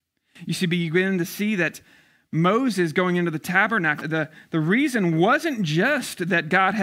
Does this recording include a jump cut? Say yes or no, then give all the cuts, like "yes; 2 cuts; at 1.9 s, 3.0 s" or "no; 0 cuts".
yes; 1 cut; at 4.0 s